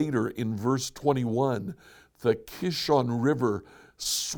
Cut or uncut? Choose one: uncut